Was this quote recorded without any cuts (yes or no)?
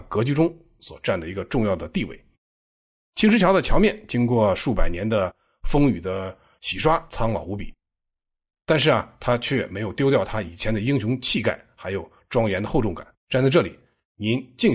no